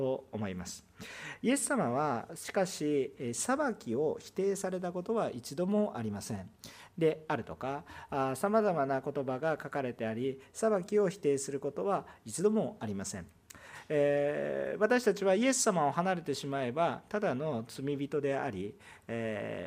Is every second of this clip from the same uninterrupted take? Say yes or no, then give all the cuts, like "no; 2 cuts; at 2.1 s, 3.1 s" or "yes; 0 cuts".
no; 1 cut; at 6.9 s